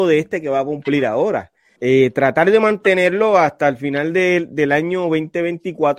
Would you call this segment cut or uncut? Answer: cut